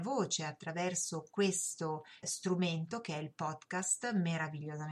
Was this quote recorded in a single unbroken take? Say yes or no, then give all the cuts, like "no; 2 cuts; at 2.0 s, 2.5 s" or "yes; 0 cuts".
no; 1 cut; at 2.2 s